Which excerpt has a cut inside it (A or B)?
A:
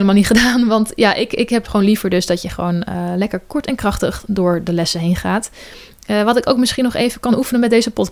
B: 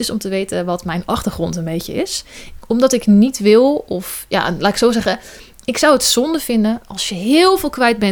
B